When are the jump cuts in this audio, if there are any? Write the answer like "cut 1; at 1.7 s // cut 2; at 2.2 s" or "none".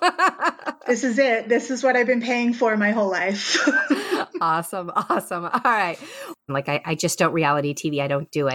cut 1; at 6.5 s